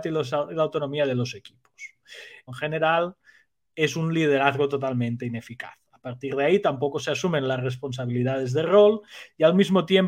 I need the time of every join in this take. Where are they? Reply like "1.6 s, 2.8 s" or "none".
2.5 s